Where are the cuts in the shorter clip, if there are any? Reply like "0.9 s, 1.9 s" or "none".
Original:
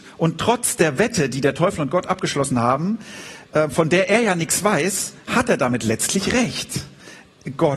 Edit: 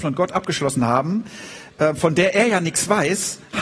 none